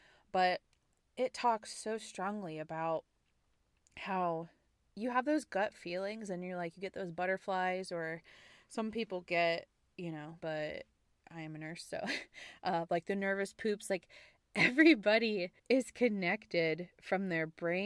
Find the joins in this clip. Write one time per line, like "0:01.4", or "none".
0:10.4
0:15.6

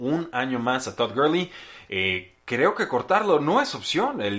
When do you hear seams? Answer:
0:01.9

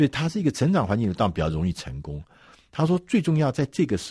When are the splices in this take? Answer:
none

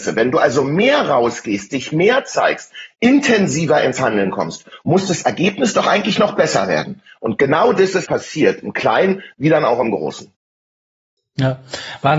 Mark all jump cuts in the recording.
0:08.1

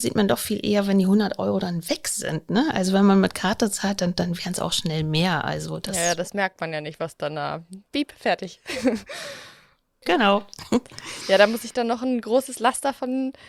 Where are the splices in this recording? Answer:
none

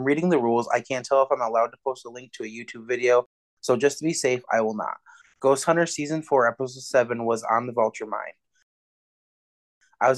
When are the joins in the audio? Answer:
0:05.2

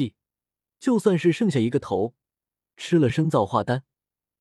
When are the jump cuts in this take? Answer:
0:03.1

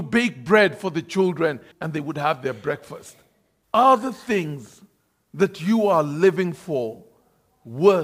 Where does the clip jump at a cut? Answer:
0:01.7
0:03.6

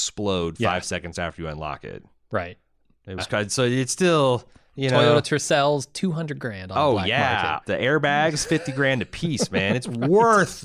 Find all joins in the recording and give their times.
0:03.2
0:07.6

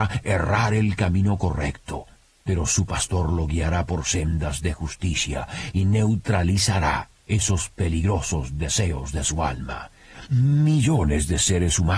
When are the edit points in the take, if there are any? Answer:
none

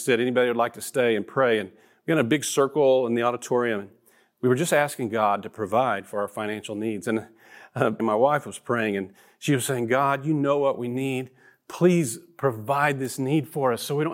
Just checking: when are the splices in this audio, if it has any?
0:08.0

